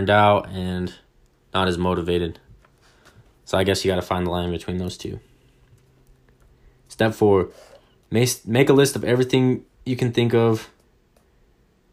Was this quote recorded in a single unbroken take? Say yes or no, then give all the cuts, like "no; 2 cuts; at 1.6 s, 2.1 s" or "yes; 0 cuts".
yes; 0 cuts